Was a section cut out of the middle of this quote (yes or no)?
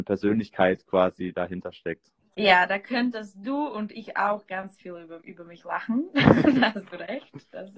yes